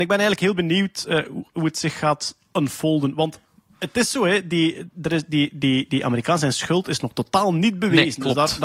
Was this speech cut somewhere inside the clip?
no; 0 cuts

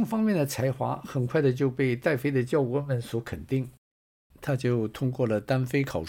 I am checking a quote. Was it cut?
yes; 1 cut; at 4.3 s

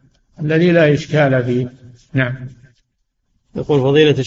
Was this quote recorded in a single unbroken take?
yes; 0 cuts

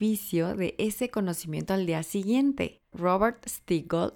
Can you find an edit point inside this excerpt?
yes; 1 cut; at 2.9 s

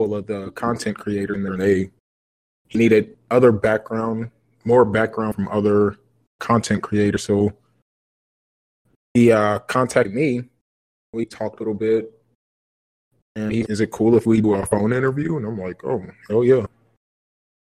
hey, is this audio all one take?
no; 1 cut; at 13.6 s

